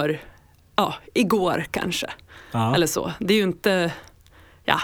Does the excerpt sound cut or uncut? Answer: uncut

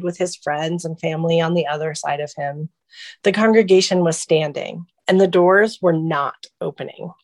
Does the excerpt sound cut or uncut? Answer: cut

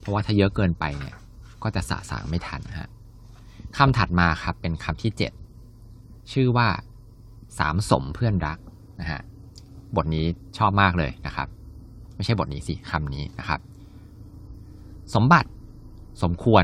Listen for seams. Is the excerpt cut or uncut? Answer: cut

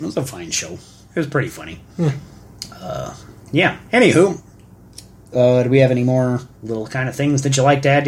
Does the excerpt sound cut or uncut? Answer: cut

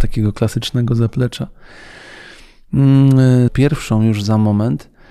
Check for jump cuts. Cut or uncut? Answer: cut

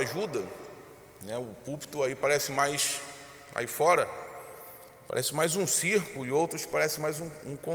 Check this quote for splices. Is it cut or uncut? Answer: uncut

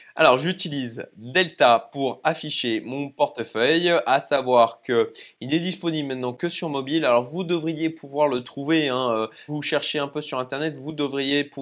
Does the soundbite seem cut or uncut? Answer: cut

